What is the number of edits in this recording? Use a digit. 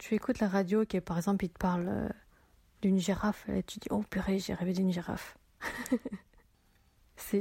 0